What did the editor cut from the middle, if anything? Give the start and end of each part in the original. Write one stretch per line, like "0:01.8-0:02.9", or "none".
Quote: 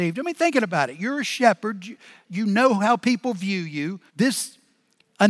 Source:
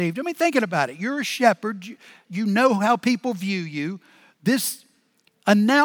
0:04.1-0:04.3